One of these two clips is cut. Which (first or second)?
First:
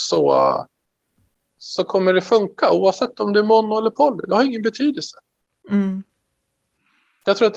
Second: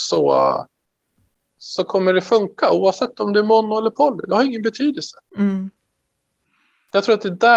second